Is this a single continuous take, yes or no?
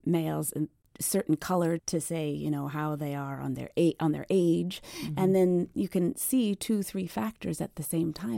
no